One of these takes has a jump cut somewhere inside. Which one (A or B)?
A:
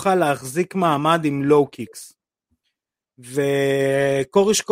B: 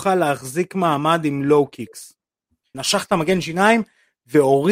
B